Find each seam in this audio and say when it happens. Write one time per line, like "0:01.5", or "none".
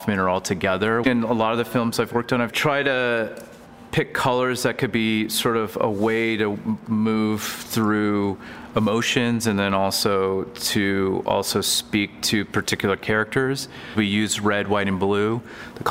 0:01.0